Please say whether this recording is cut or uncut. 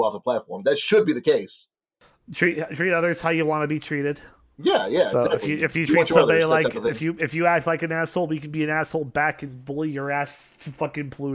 uncut